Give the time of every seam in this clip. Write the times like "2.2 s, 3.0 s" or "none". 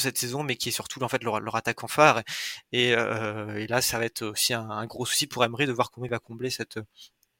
none